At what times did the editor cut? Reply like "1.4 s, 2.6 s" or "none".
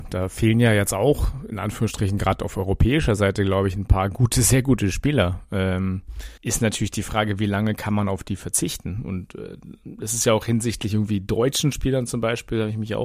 6.4 s